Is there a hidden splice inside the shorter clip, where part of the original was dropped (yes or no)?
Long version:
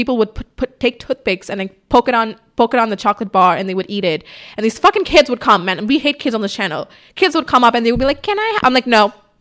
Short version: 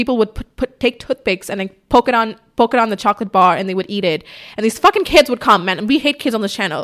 no